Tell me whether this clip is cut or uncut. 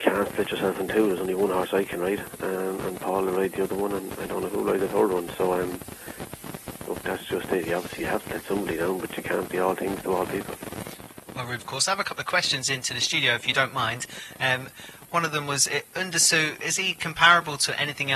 cut